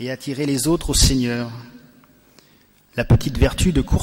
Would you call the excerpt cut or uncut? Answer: uncut